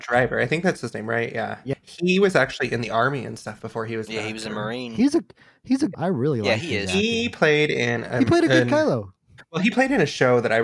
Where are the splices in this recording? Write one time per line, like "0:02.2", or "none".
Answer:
0:05.9